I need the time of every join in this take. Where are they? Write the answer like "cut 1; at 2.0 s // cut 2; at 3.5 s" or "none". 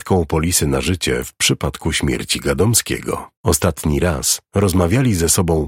cut 1; at 3.4 s